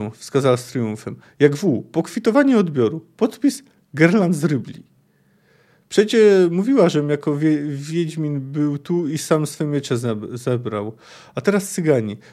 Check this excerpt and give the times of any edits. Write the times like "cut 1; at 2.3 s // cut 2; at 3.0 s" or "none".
none